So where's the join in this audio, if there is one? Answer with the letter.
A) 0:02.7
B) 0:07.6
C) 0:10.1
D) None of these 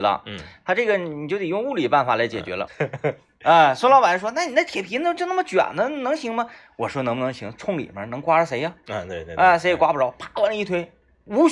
A